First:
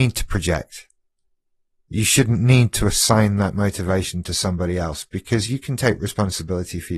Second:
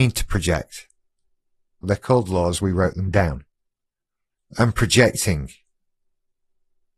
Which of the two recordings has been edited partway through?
second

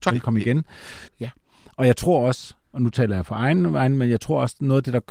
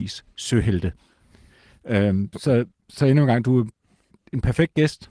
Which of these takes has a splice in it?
first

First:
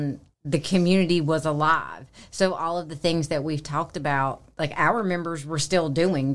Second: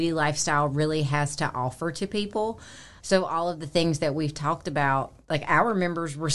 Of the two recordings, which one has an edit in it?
second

